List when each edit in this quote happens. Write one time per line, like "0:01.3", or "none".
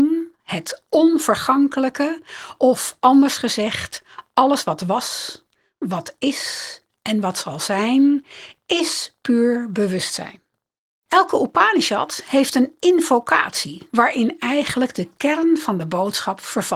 0:11.1
0:13.9